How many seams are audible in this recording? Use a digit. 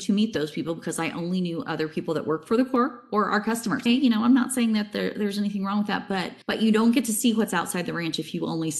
2